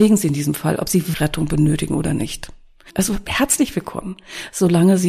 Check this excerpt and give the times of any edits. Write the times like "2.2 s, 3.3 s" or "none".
1.1 s, 2.9 s